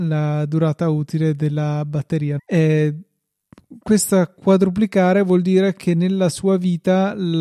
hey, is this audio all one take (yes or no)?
no